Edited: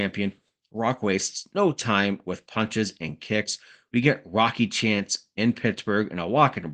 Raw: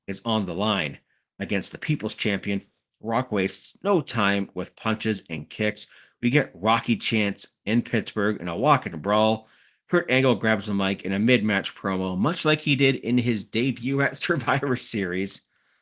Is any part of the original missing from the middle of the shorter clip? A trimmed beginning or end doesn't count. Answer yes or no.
no